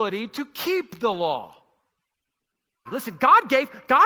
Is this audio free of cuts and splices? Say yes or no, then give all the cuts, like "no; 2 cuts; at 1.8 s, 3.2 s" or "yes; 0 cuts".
no; 1 cut; at 2.9 s